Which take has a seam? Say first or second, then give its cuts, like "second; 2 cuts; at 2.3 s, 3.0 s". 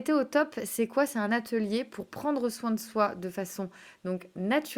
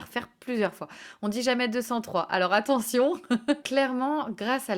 second; 1 cut; at 3.6 s